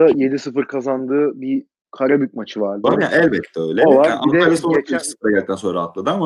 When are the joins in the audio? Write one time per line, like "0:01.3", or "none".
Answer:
0:02.8

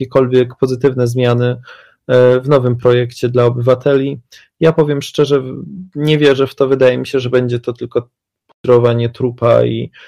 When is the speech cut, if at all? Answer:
none

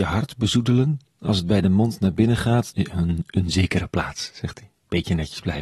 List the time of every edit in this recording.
0:02.7

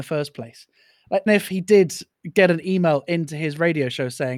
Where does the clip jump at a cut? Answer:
0:01.3

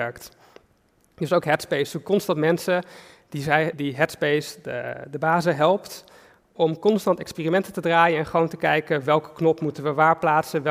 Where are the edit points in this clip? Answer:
0:03.7

